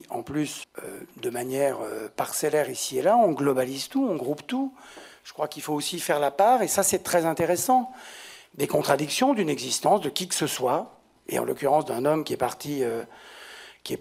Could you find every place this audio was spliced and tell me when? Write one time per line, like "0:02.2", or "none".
none